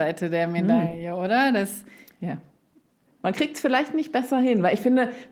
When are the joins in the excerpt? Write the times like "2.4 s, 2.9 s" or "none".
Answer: 3.1 s